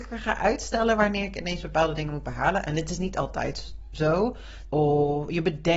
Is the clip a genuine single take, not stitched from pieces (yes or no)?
no